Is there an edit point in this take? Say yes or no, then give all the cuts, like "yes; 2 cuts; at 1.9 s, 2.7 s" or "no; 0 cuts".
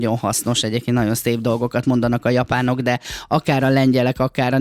no; 0 cuts